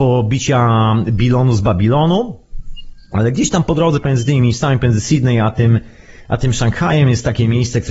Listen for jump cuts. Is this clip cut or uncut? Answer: uncut